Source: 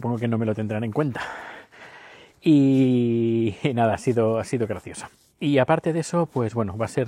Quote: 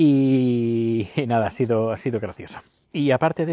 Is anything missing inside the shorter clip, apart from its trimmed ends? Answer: no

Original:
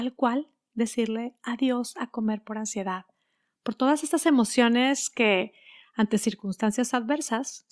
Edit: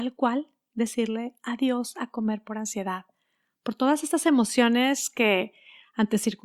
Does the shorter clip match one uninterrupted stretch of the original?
yes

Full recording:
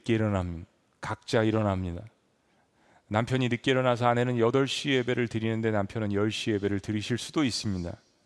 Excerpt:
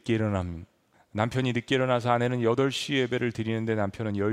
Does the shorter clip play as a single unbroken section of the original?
no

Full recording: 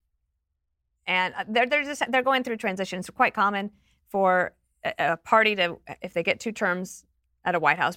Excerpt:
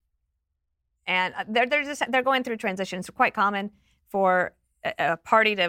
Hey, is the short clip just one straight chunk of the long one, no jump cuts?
yes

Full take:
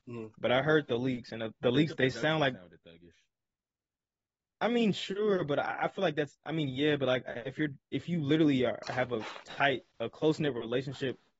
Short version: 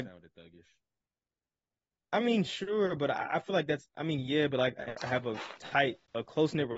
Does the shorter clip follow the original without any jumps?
no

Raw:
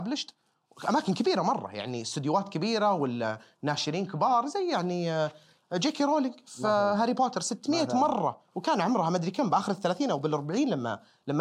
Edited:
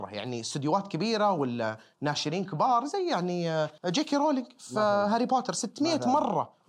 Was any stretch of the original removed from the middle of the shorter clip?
yes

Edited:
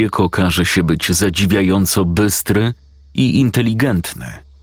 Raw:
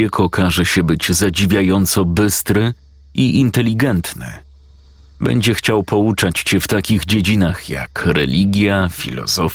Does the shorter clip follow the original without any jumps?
yes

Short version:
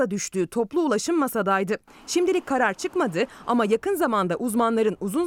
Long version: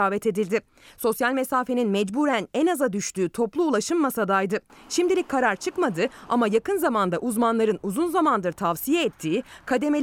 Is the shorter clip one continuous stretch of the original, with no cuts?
yes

